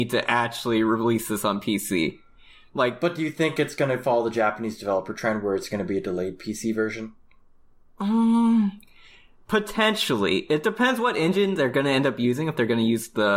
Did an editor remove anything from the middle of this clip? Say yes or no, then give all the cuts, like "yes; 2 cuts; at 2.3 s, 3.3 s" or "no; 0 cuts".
no; 0 cuts